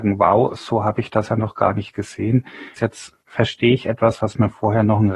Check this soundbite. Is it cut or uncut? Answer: cut